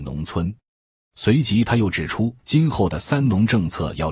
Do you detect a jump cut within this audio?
yes; 1 cut; at 2.4 s

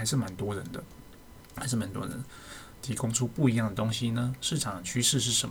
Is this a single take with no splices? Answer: no; 1 cut; at 2.7 s

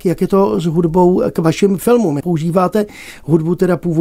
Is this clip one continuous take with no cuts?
no; 1 cut; at 2.2 s

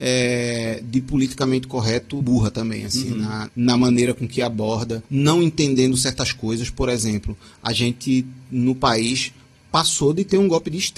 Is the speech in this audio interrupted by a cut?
yes; 3 cuts; at 2.2 s, 3.5 s, 5.1 s

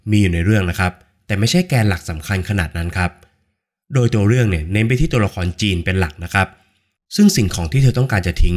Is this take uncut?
yes; 0 cuts

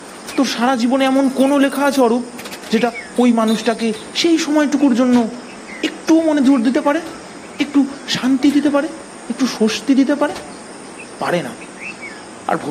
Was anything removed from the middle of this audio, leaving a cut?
no; 0 cuts

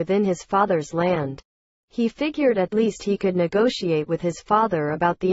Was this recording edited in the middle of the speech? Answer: yes; 1 cut; at 2.7 s

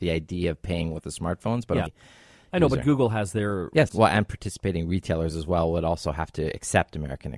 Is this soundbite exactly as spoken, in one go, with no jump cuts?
no; 2 cuts; at 1.9 s, 3.9 s

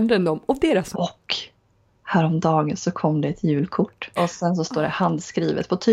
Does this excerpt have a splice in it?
yes; 2 cuts; at 0.9 s, 4.2 s

